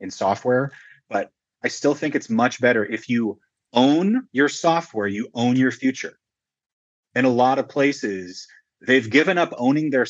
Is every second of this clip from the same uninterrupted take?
yes; 0 cuts

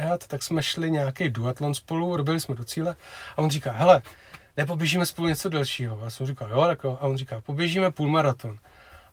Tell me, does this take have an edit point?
no; 0 cuts

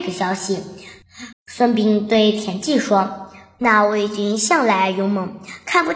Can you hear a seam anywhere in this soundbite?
yes; 1 cut; at 1.3 s

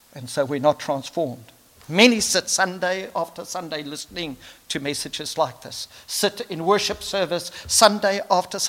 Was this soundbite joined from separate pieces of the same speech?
no; 0 cuts

